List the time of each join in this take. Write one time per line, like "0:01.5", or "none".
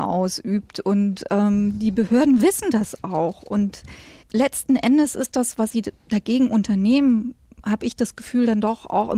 none